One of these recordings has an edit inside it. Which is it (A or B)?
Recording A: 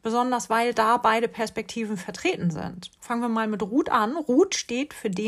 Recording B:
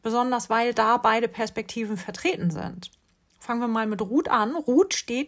A